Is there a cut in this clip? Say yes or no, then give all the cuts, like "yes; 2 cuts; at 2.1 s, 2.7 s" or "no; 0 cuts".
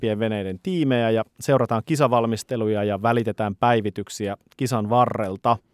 no; 0 cuts